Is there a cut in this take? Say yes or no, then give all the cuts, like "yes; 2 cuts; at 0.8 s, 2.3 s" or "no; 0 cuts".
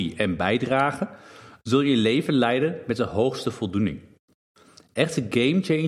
no; 0 cuts